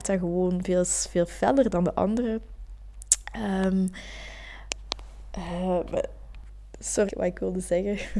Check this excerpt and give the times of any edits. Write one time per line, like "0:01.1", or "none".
0:07.1

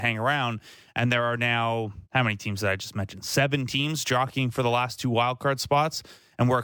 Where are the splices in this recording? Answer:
0:02.0

